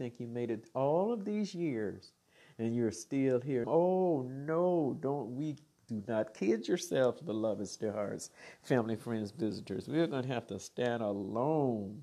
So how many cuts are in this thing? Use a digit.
1